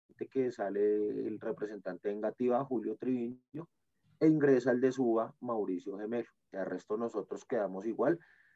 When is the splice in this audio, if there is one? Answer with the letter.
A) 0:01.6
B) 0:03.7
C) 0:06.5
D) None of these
C